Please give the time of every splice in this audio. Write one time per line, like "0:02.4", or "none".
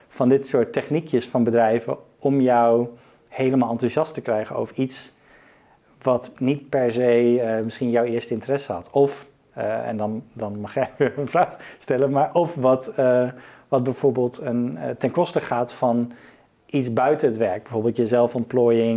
none